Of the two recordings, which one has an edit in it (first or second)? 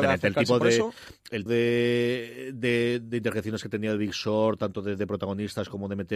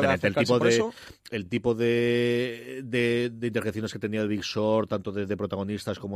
first